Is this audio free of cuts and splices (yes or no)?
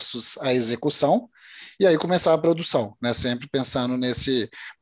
yes